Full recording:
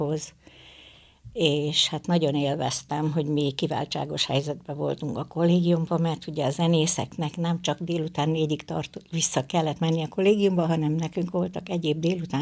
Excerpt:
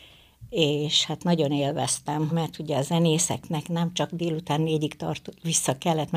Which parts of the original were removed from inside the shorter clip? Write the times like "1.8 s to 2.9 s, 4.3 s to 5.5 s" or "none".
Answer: 3.1 s to 6.0 s